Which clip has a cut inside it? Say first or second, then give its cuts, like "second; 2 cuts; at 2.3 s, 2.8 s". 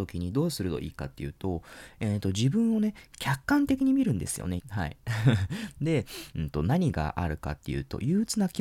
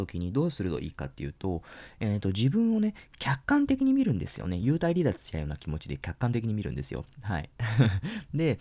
first; 2 cuts; at 4.6 s, 6.3 s